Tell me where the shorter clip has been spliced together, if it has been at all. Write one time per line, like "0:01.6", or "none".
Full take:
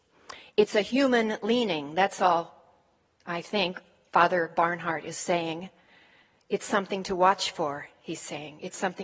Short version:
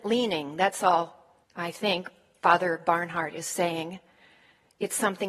0:01.4